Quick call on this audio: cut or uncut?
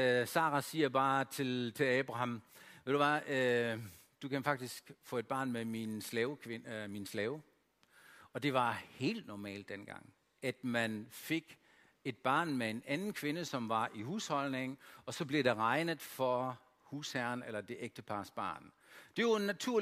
uncut